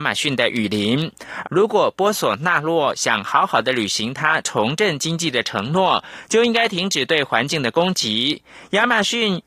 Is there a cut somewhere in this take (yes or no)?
yes